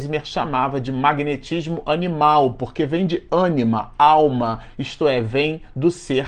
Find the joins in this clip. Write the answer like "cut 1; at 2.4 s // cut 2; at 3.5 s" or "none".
none